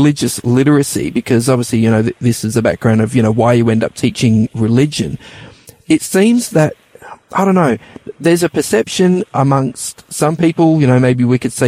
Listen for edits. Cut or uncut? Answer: uncut